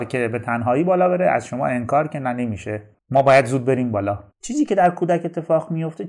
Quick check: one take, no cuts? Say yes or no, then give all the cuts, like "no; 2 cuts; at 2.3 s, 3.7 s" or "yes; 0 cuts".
no; 1 cut; at 4.3 s